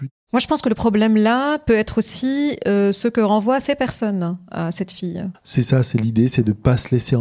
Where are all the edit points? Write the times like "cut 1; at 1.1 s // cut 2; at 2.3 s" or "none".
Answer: cut 1; at 5.3 s